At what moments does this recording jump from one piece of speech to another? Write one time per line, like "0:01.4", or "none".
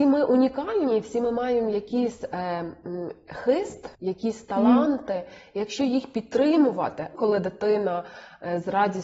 0:03.9
0:07.1